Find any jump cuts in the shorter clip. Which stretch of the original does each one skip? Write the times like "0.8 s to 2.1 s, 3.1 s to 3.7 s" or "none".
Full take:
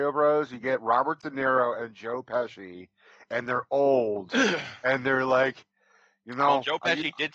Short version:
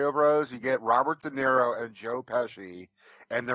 none